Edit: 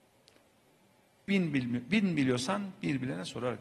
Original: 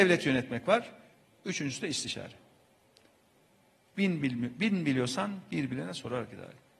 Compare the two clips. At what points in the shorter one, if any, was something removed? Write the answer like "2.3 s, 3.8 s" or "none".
none

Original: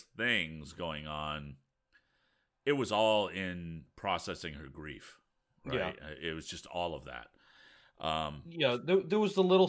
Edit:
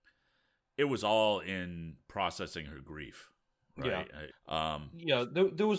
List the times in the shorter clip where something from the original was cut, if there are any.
4.3 s

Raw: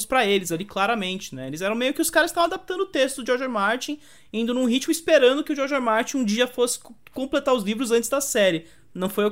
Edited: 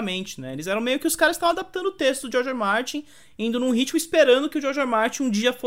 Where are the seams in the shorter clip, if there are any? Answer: none

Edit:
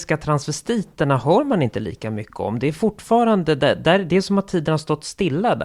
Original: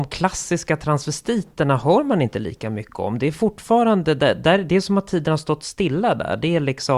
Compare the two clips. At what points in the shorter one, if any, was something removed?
none

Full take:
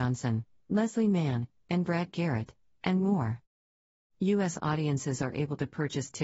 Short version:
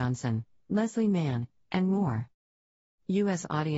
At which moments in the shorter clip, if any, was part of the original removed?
1.6 s

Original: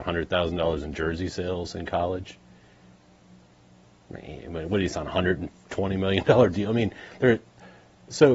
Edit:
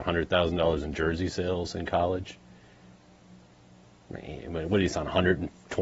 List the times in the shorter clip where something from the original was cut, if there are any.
none

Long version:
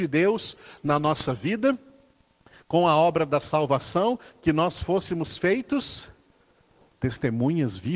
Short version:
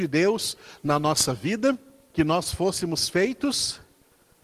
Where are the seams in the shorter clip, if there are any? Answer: 2.1 s

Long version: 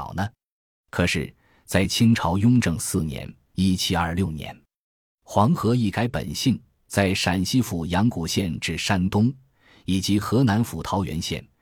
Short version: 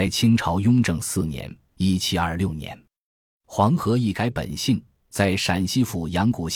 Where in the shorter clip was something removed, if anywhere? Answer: none

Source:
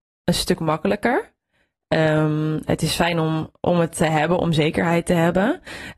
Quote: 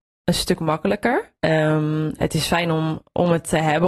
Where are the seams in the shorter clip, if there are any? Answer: 1.4 s

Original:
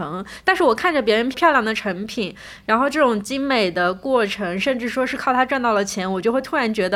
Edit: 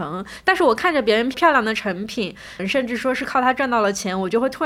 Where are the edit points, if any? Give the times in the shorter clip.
2.6 s

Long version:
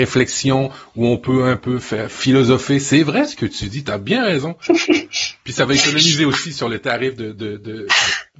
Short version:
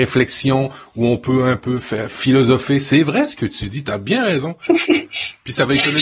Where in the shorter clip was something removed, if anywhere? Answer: none

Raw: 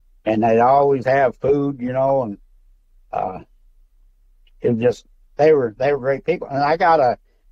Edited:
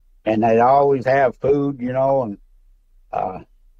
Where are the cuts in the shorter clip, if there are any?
none

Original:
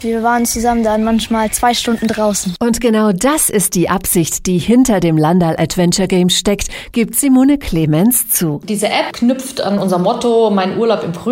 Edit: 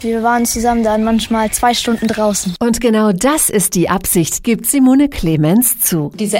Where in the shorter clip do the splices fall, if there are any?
4.4 s

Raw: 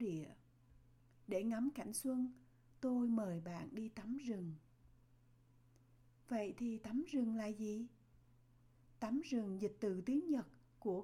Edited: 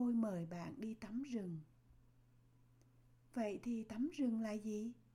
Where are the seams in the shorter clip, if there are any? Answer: none

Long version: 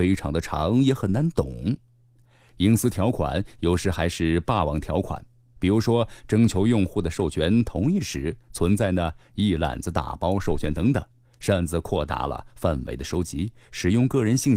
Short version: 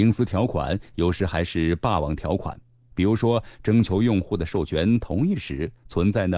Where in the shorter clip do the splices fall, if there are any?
none

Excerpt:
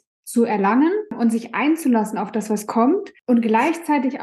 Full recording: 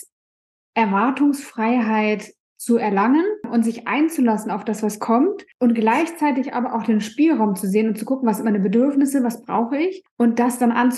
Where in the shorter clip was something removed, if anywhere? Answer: none

